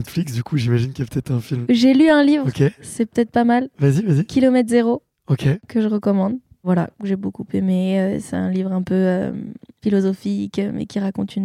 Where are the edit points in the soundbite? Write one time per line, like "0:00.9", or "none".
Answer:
none